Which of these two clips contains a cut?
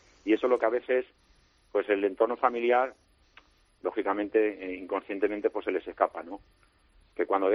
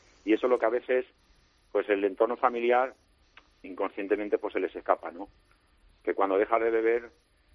second; 1 cut; at 3.6 s

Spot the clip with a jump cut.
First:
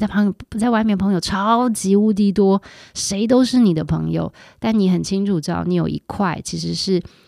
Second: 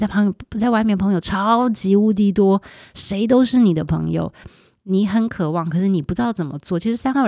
second; 1 cut; at 4.4 s

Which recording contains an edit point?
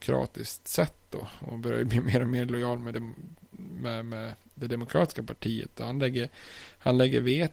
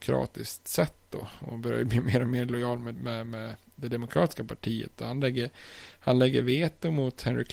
second; 1 cut; at 2.9 s

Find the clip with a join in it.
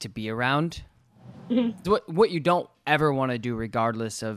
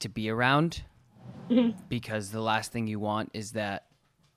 first; 1 cut; at 1.8 s

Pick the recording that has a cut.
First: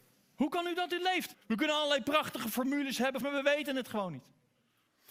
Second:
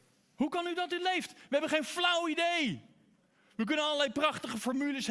first; 2 cuts; at 1.3 s, 3.2 s

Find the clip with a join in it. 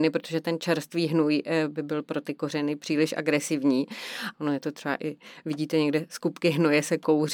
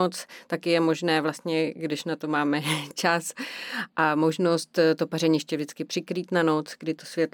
first; 1 cut; at 4.3 s

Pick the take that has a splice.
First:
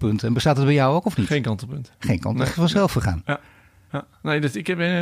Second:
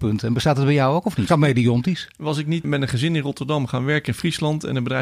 second; 2 cuts; at 1.3 s, 2.6 s

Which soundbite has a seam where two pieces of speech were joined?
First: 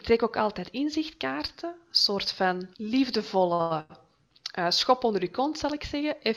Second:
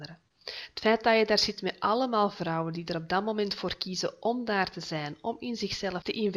first; 1 cut; at 2.7 s

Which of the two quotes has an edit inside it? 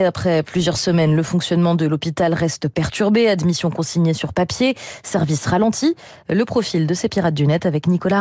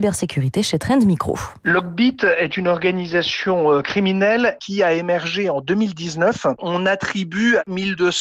first; 1 cut; at 6.2 s

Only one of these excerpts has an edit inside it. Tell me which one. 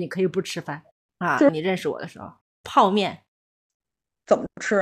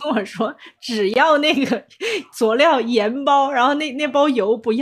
first; 1 cut; at 1.5 s

